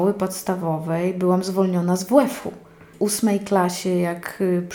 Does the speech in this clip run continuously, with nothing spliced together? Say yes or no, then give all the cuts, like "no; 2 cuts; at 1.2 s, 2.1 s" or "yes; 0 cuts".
yes; 0 cuts